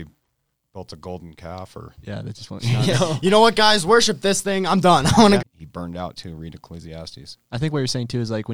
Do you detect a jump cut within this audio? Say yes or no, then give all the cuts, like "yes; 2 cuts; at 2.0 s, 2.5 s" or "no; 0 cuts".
yes; 1 cut; at 5.4 s